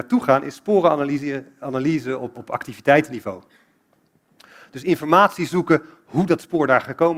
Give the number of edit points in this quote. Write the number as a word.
one